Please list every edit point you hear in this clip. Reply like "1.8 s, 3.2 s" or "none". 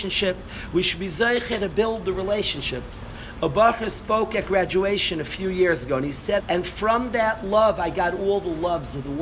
6.4 s

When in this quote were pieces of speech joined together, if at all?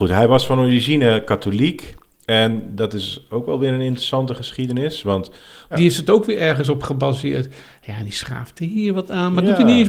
5.7 s

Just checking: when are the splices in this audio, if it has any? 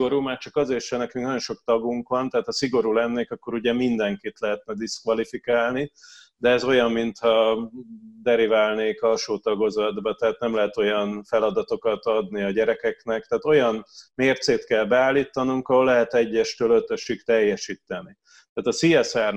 none

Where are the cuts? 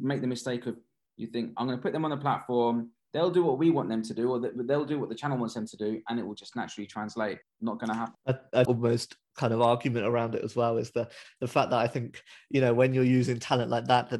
1.0 s, 8.6 s

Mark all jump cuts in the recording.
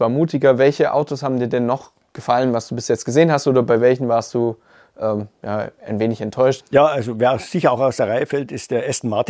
6.6 s

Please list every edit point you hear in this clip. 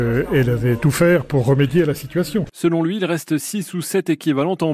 2.5 s

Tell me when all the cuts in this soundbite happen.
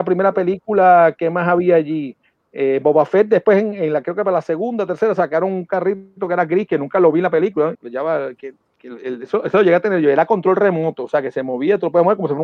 7.7 s

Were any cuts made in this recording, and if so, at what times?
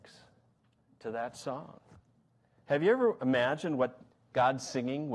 none

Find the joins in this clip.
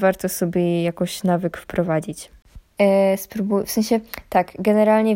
2.7 s

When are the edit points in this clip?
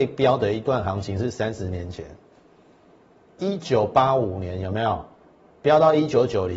3.4 s

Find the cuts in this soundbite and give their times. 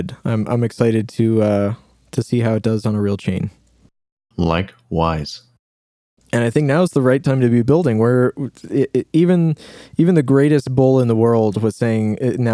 none

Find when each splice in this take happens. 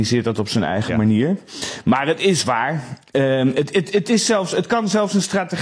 none

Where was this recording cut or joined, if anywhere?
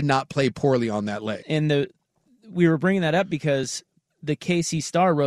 1.4 s

